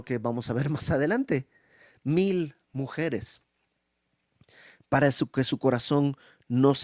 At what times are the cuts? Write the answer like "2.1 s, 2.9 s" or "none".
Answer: none